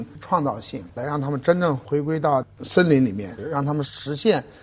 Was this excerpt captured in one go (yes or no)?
no